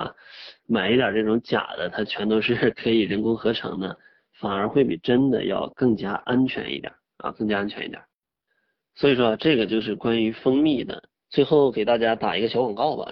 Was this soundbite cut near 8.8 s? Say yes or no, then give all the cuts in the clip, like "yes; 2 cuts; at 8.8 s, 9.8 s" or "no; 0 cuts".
no; 1 cut; at 11.2 s